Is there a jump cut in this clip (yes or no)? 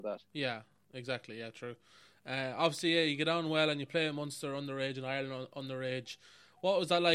no